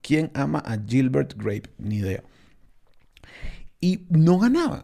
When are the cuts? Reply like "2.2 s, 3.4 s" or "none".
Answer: 3.7 s